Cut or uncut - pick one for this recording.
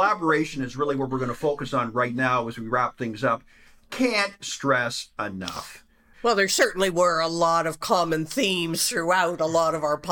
cut